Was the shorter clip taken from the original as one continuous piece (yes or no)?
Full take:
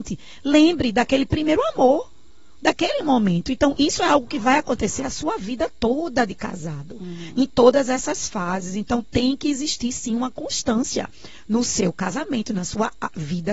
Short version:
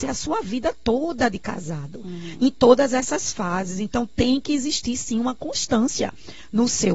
yes